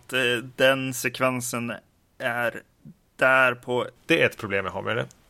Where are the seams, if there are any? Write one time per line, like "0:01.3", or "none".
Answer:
0:04.0

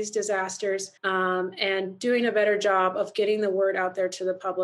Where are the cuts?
0:01.0

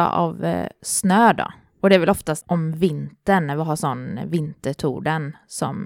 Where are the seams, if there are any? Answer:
0:02.4

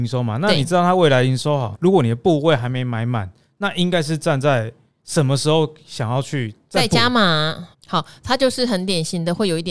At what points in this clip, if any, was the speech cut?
0:01.7
0:07.7

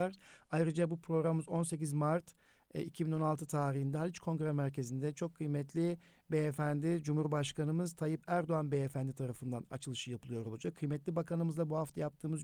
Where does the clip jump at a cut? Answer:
none

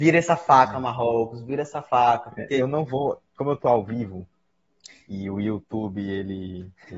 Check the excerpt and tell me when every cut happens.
0:03.2

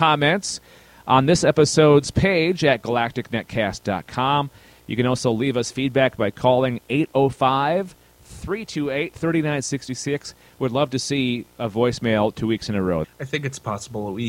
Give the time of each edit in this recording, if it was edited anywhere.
0:13.0

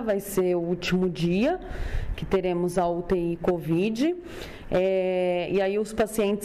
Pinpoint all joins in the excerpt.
none

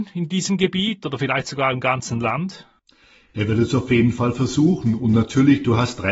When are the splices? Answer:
none

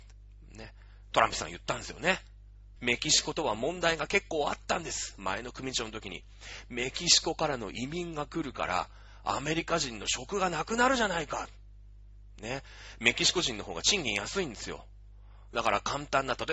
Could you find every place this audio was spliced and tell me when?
0:02.8

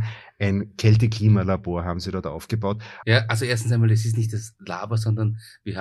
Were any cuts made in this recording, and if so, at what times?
0:03.0

